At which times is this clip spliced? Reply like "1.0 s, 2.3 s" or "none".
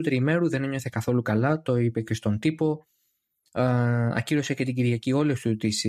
none